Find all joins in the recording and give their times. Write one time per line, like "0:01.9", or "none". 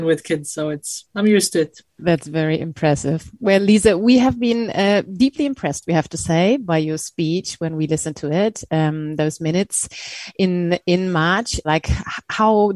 0:01.9
0:11.6